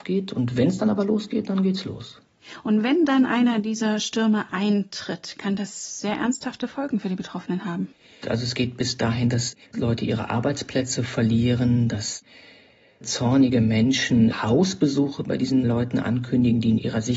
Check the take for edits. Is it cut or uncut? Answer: cut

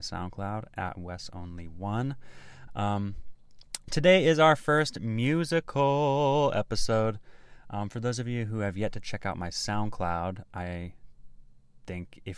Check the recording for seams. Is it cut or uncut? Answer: cut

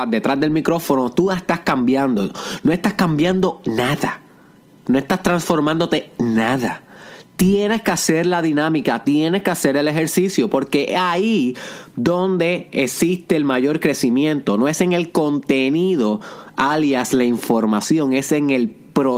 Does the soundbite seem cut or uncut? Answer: uncut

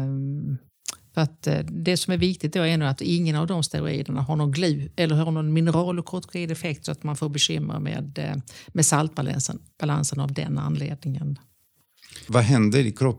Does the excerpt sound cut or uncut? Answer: uncut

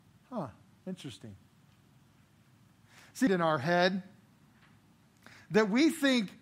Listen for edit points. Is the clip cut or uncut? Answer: cut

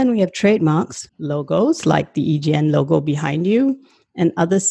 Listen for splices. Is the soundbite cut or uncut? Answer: cut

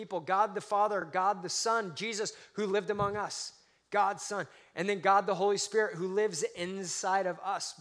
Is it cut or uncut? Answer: uncut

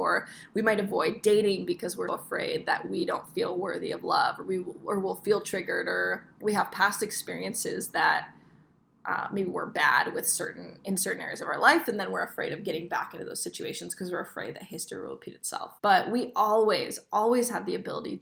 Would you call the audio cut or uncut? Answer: cut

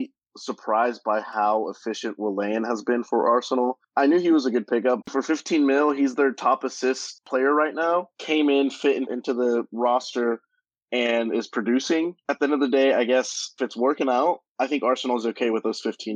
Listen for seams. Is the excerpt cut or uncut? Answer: cut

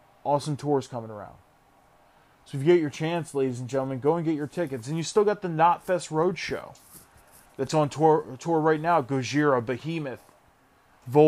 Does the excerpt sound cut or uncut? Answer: uncut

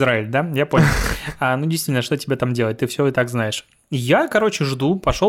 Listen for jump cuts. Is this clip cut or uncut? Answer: uncut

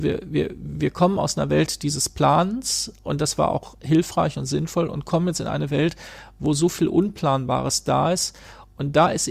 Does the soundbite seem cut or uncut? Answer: uncut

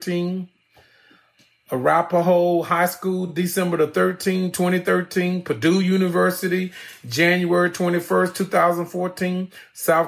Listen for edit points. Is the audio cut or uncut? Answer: uncut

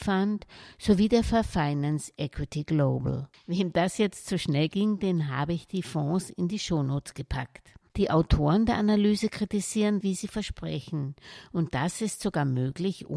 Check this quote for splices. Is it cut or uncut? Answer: cut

